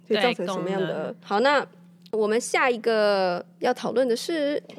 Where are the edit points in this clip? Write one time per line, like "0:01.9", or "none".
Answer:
0:01.2